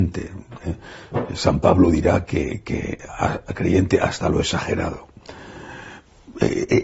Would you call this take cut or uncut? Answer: uncut